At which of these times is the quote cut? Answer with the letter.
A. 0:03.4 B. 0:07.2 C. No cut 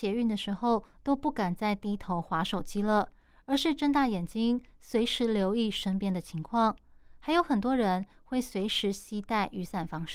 C